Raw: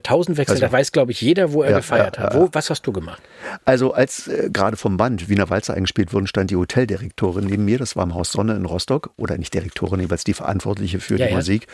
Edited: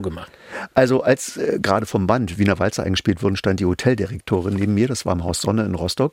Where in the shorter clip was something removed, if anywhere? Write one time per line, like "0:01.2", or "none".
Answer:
none